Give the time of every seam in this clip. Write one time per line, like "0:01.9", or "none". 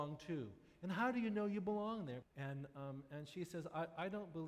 0:02.2